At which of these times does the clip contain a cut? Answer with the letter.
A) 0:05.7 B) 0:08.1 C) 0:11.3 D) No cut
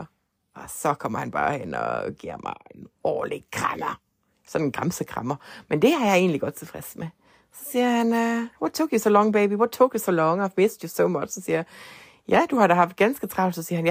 D